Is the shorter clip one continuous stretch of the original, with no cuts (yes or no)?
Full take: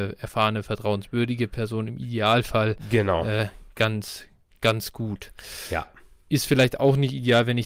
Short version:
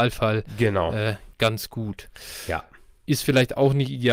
no